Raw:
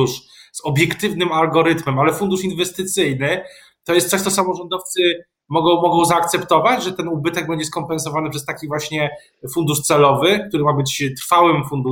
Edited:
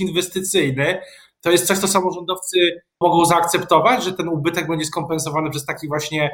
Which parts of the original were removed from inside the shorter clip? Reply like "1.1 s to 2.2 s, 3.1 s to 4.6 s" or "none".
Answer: 5.4 s to 5.8 s